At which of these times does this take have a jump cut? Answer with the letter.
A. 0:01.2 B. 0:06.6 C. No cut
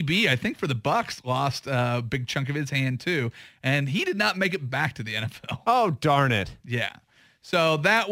C